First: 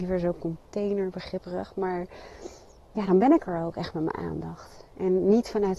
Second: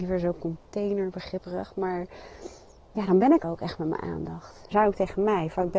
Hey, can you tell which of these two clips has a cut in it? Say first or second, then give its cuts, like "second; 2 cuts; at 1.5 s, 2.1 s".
second; 2 cuts; at 3.4 s, 4.7 s